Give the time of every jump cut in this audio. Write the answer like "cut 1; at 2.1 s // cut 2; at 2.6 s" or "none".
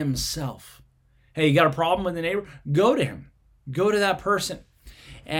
none